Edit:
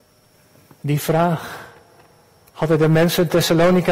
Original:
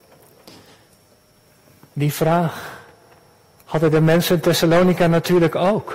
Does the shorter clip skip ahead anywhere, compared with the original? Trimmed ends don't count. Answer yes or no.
no